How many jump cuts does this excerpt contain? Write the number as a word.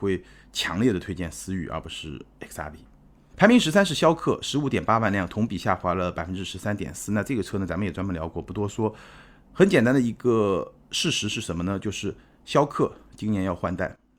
zero